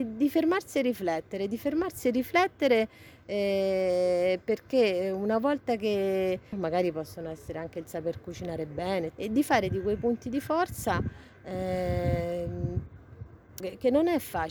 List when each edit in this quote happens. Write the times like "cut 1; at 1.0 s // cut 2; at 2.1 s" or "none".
cut 1; at 6.5 s // cut 2; at 9.1 s // cut 3; at 13.6 s